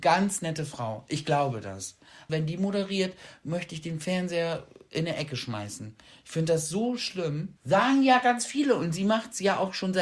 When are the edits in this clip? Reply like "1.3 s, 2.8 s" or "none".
2.3 s, 7.6 s